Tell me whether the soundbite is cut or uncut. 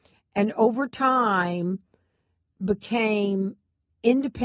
uncut